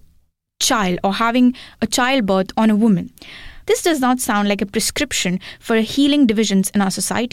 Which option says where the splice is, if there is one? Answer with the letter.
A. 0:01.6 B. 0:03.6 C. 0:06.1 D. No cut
B